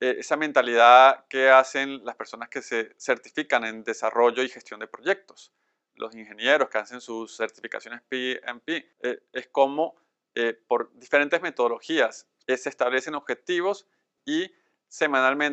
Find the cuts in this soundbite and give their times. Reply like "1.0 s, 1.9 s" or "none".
8.9 s, 12.4 s, 14.2 s

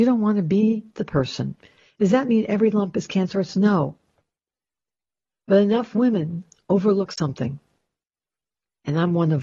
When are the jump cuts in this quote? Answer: none

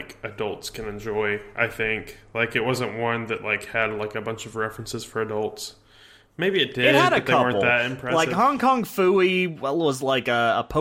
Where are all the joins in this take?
none

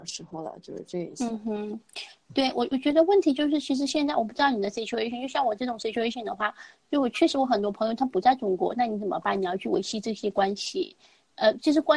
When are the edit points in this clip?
none

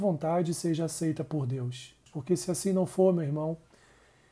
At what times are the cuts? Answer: 2.1 s

